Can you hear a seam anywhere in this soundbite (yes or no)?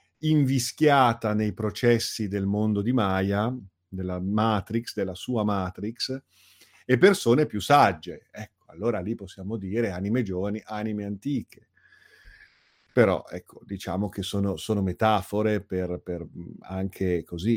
no